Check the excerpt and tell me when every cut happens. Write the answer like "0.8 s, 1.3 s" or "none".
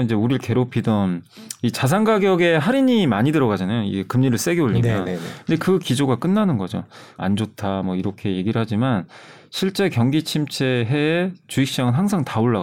7.2 s